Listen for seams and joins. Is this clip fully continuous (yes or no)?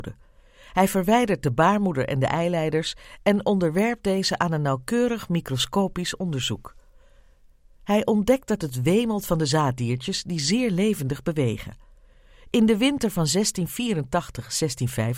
yes